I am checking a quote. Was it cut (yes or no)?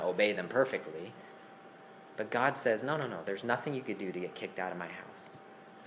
no